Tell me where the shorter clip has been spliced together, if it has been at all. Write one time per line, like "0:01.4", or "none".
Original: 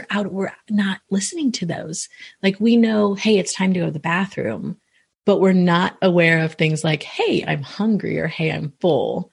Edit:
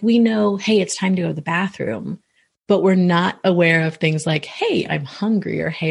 none